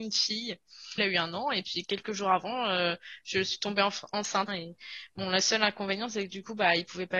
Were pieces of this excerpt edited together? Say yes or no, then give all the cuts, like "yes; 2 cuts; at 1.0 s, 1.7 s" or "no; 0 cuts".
yes; 2 cuts; at 1.0 s, 4.5 s